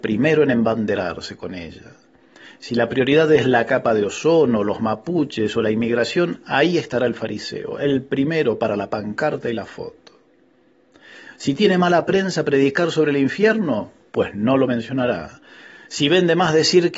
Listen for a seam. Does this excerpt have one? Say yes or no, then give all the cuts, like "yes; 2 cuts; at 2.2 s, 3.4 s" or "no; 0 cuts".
no; 0 cuts